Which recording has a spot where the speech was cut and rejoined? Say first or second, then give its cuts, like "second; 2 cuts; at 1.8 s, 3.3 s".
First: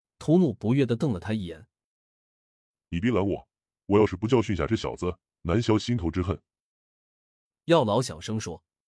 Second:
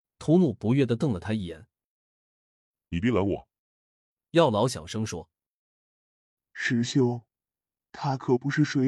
second; 1 cut; at 3.6 s